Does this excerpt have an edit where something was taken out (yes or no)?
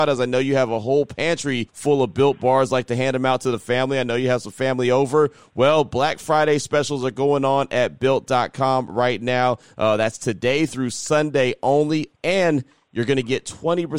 yes